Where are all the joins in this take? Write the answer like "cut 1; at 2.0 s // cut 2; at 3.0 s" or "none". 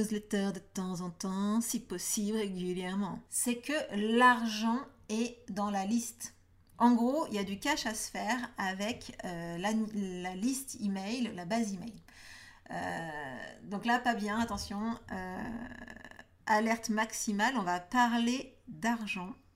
cut 1; at 3.3 s